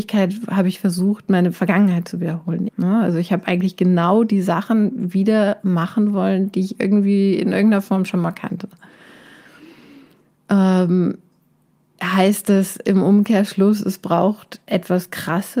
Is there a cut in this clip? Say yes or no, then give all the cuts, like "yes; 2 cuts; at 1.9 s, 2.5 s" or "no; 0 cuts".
yes; 1 cut; at 2.7 s